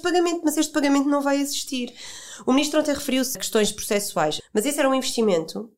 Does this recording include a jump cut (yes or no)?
yes